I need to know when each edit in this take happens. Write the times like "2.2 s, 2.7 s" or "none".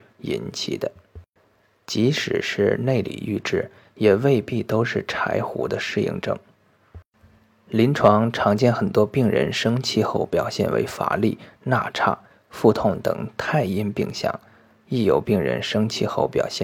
none